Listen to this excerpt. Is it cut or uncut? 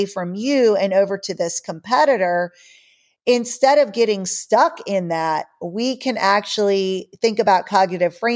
uncut